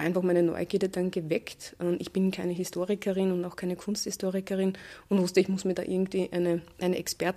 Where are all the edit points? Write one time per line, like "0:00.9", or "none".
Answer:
none